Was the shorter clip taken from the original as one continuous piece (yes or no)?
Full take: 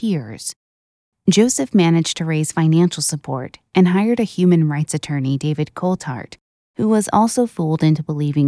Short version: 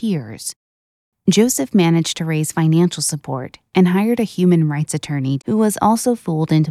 no